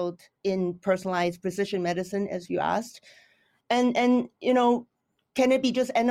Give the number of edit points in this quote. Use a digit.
0